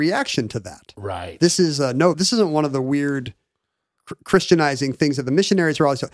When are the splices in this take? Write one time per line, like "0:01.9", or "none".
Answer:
0:02.1